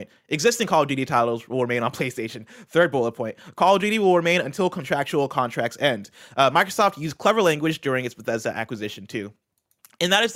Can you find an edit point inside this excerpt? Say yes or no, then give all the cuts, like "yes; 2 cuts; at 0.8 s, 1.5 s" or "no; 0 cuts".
no; 0 cuts